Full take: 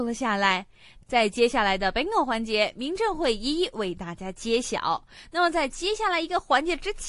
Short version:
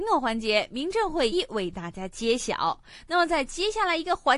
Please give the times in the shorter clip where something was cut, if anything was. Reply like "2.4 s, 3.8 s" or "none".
1.3 s